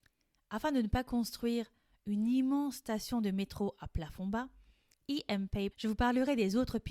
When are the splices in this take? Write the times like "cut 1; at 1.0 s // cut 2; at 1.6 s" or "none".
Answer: cut 1; at 5.7 s